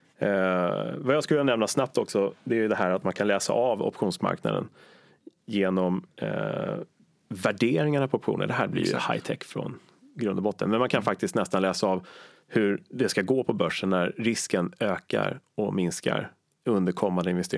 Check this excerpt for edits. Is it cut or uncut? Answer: uncut